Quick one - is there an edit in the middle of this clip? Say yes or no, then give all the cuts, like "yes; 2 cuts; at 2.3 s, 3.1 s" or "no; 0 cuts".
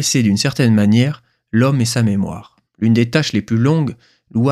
yes; 1 cut; at 2.7 s